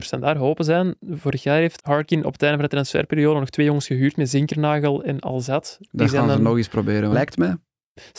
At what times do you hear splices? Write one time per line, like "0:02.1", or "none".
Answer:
0:01.8
0:07.1

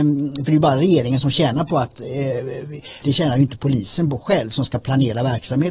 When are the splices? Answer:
0:03.0

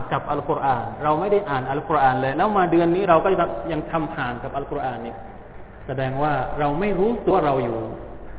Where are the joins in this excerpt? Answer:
0:07.3

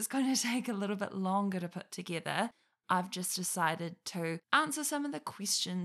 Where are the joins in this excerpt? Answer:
0:04.4

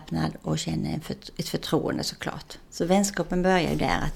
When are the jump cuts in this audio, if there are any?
0:02.6

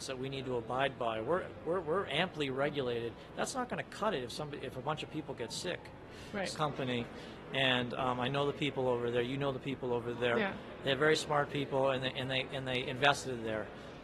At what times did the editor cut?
0:06.5

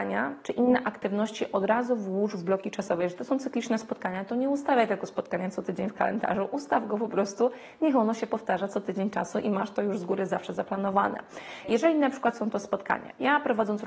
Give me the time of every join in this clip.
0:11.6

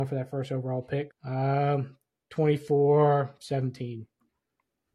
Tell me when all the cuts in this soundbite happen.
0:01.1

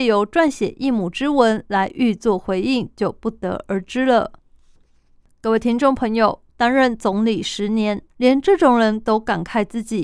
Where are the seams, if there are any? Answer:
0:06.5
0:08.1

